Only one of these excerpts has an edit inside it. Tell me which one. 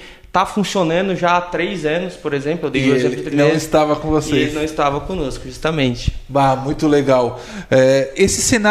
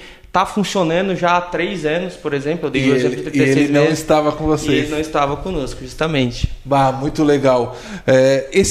first; 1 cut; at 3.3 s

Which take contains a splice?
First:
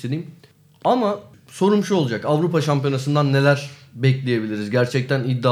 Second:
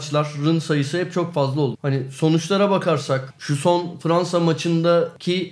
second; 1 cut; at 1.7 s

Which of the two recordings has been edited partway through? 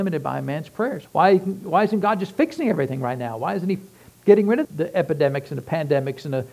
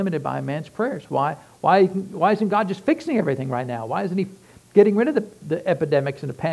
first; 2 cuts; at 1.1 s, 4.6 s

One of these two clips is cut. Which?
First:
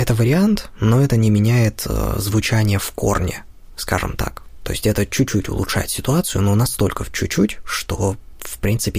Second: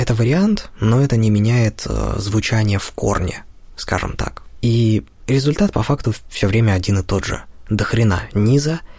second; 1 cut; at 4.6 s

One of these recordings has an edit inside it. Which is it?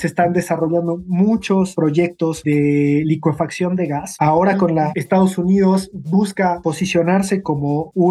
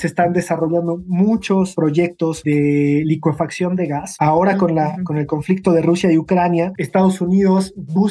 first; 1 cut; at 4.9 s

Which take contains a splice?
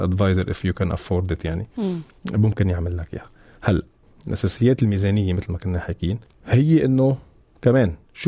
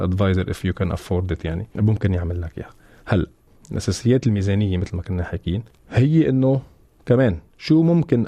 second; 1 cut; at 1.8 s

